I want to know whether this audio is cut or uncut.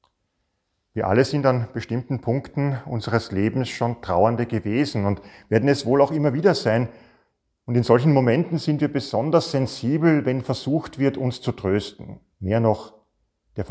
cut